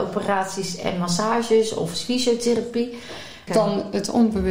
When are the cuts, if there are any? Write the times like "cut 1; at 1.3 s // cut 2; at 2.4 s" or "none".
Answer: cut 1; at 3.5 s